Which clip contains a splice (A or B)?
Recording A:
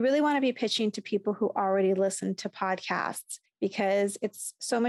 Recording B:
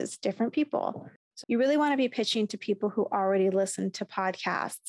B